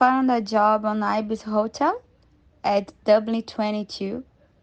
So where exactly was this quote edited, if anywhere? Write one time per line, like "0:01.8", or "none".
none